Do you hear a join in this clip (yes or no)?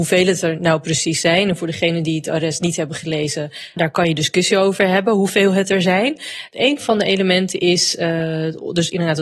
yes